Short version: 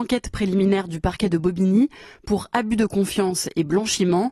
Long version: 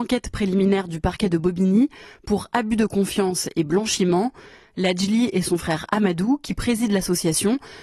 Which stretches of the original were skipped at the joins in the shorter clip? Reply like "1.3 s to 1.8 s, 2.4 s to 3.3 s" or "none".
none